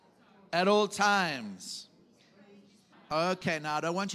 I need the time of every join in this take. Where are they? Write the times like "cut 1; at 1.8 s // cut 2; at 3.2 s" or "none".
cut 1; at 2.9 s